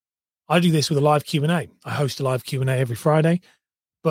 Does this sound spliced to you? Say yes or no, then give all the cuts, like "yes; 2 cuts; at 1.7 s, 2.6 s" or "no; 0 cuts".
no; 0 cuts